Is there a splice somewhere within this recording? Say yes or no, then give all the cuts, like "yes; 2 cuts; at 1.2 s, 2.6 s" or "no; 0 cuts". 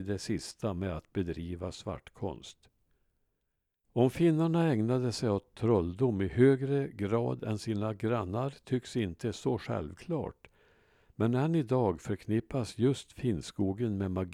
yes; 1 cut; at 3.8 s